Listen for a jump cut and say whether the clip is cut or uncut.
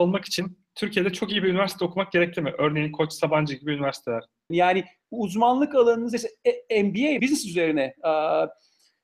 cut